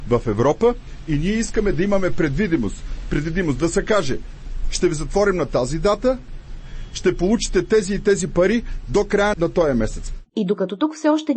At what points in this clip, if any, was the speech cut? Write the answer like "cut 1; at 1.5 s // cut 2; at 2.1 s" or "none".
cut 1; at 9.3 s